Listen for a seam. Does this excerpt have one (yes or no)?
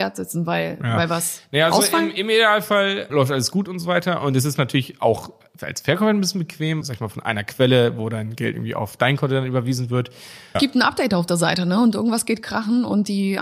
yes